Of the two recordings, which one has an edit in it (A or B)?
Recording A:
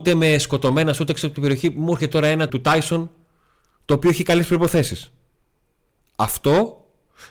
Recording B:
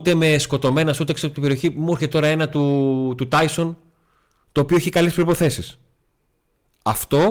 A